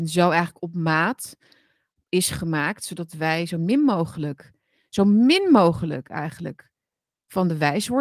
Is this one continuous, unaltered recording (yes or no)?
yes